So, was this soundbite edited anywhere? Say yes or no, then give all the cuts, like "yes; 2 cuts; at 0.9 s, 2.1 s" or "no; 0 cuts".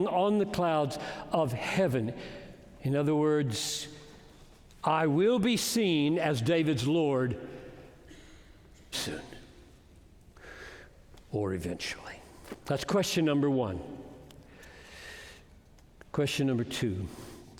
yes; 1 cut; at 8.9 s